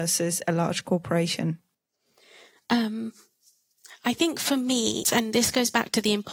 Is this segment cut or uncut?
cut